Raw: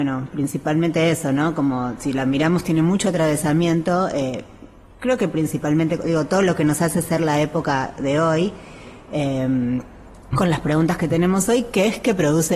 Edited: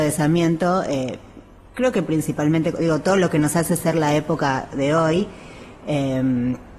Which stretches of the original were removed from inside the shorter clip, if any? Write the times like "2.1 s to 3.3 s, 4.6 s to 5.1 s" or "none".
none

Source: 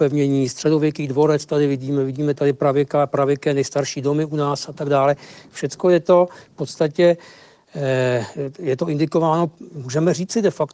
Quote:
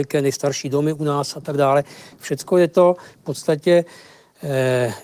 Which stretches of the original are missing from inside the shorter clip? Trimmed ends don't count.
none

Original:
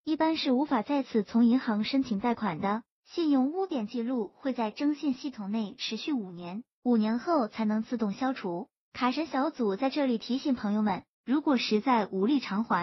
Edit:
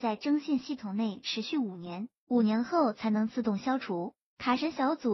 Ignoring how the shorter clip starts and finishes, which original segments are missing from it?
none

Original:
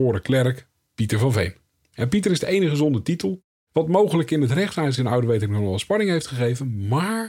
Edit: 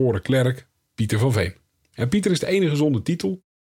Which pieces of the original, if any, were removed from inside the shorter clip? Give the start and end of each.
none

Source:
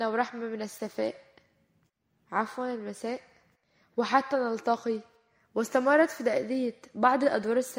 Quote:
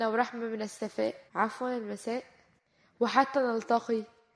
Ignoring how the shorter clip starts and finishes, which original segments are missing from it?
1.3 s to 2.2 s

